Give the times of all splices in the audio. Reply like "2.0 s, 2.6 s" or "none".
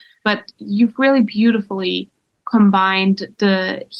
none